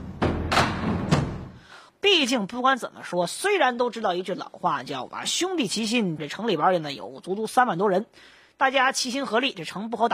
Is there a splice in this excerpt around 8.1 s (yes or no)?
no